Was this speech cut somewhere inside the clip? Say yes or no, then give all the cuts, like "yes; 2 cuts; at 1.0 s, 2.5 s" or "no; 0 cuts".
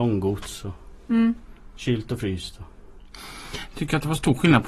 no; 0 cuts